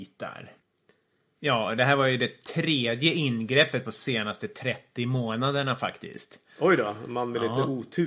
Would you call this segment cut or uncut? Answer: uncut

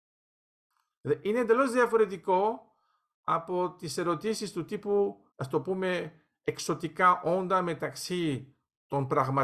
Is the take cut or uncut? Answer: cut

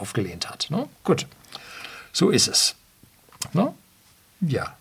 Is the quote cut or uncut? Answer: cut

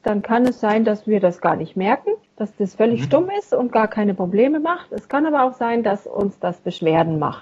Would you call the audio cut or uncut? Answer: cut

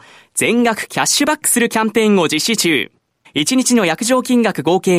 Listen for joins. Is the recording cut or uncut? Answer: cut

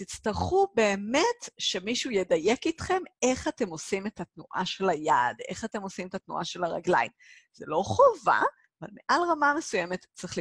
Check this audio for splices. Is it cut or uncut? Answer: uncut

